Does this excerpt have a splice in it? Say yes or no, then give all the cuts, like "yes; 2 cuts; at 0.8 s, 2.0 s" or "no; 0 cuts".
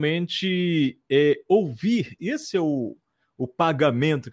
yes; 1 cut; at 2.2 s